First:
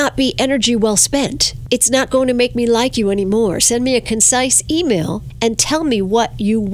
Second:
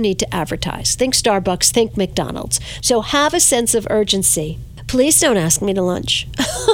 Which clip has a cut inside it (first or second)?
second